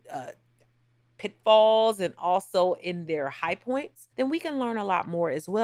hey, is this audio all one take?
no; 1 cut; at 4.1 s

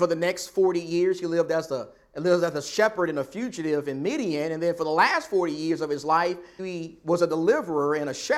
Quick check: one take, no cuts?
no; 1 cut; at 6.6 s

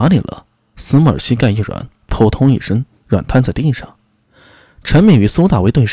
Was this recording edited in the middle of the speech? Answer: no; 0 cuts

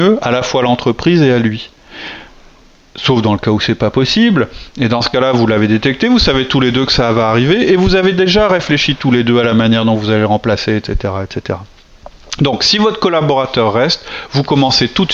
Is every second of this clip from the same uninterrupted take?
yes; 0 cuts

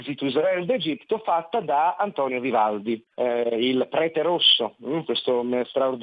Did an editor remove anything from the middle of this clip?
yes; 1 cut; at 3.1 s

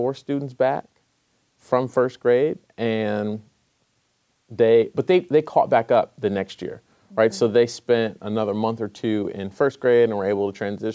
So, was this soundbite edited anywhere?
no; 0 cuts

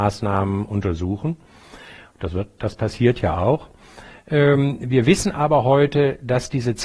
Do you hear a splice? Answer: no; 0 cuts

